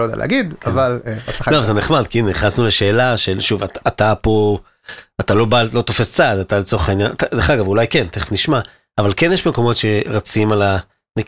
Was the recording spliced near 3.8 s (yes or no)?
no